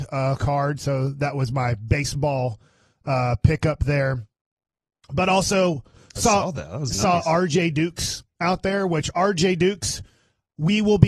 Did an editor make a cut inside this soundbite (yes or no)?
no